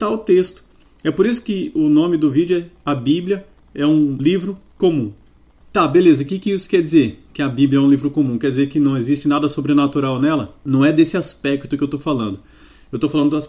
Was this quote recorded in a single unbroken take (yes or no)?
yes